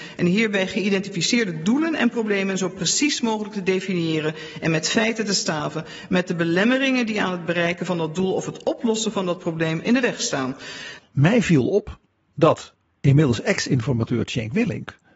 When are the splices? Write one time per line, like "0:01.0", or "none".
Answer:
0:11.0

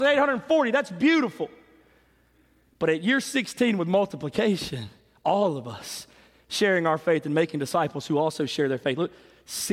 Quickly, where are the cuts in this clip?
none

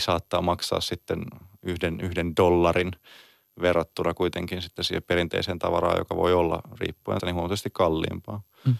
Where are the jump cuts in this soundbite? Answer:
0:07.2

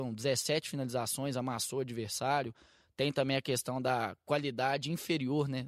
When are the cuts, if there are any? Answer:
none

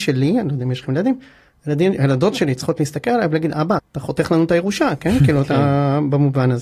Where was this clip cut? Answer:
0:03.8

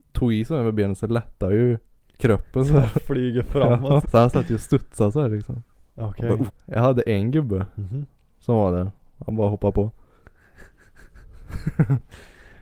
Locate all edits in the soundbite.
0:04.0
0:06.5
0:09.0

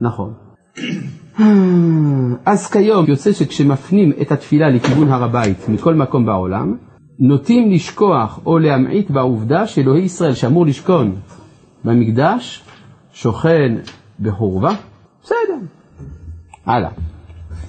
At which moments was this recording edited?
0:03.0

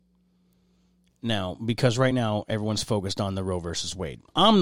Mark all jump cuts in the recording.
none

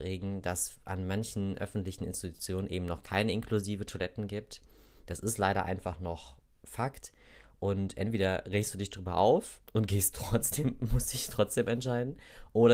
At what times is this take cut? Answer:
0:09.6

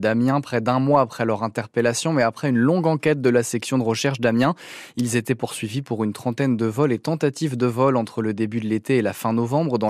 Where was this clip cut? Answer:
none

